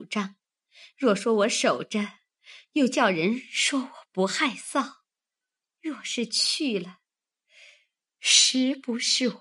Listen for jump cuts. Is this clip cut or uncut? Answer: uncut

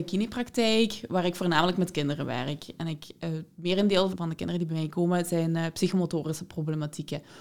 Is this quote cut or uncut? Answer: cut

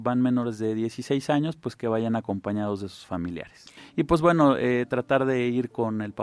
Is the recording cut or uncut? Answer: cut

